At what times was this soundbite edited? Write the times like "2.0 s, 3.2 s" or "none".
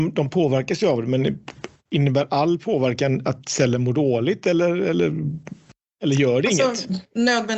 none